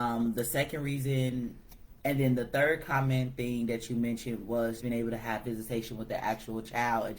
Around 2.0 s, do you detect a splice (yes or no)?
yes